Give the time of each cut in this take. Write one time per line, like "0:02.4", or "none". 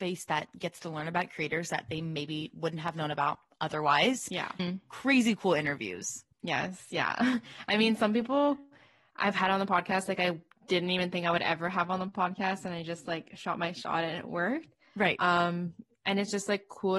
0:04.6
0:06.3